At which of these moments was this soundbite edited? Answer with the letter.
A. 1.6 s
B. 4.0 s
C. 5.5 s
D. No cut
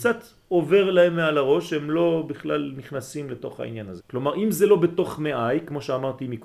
B